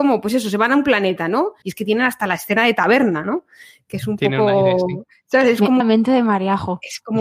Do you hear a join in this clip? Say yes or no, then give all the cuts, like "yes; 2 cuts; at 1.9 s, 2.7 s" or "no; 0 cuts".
yes; 2 cuts; at 1.6 s, 5.8 s